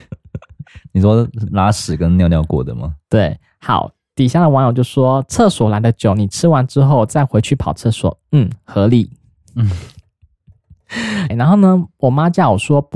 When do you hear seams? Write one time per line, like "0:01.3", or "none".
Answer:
0:04.1
0:11.3